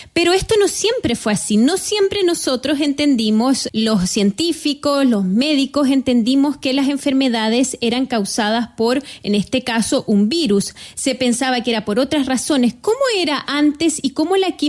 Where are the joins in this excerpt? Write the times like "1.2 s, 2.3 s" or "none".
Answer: 3.7 s